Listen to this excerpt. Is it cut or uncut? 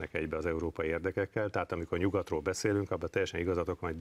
uncut